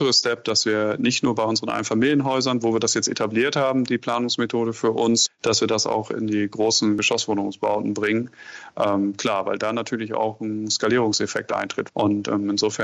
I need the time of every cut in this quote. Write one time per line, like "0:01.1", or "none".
0:05.3
0:11.9

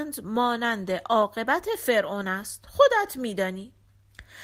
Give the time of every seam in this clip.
none

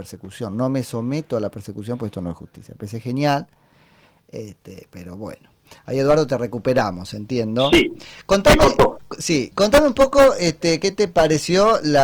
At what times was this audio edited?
none

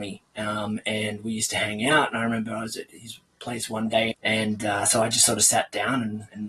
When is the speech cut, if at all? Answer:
0:04.1

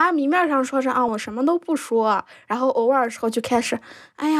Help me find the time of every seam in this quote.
0:01.1

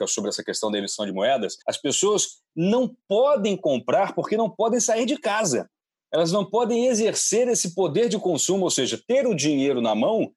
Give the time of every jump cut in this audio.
0:01.6

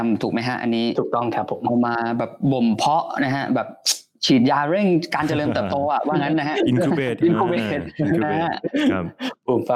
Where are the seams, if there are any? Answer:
0:07.2

